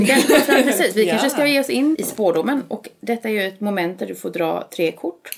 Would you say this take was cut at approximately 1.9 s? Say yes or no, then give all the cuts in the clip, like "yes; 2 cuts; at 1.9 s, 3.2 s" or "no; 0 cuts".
yes; 1 cut; at 1.9 s